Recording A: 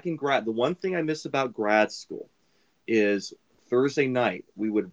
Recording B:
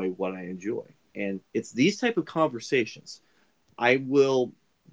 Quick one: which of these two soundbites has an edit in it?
B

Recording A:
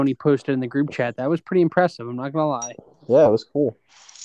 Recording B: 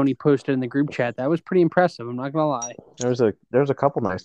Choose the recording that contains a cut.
B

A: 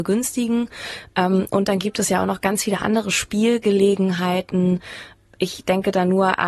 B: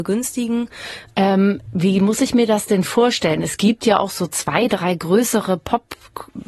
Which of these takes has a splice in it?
B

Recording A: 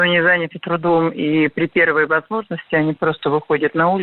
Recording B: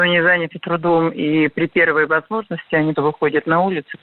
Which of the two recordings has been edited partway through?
B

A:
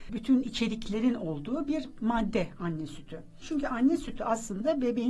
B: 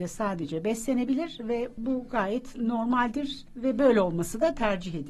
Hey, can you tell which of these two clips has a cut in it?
A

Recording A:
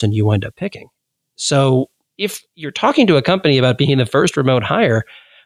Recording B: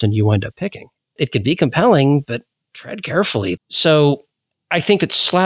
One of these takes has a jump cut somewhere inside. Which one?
B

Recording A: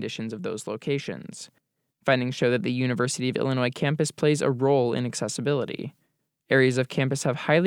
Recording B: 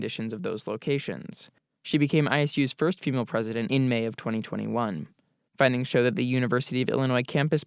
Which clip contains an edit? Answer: B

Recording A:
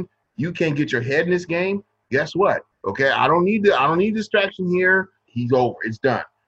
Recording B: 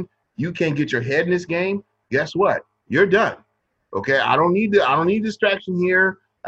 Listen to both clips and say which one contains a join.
A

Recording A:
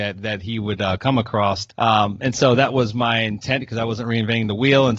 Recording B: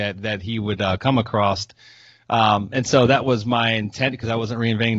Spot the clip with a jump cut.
A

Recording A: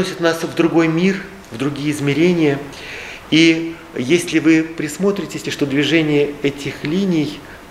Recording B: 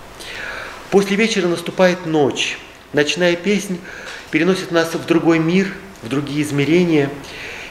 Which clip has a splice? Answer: A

